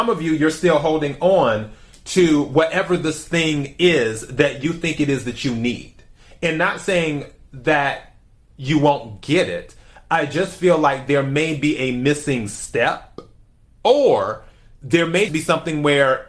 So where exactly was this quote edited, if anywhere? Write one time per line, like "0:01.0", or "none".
0:15.3